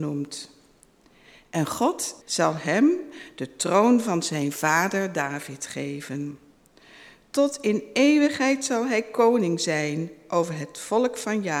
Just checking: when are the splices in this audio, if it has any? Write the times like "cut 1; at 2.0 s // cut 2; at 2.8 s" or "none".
cut 1; at 2.2 s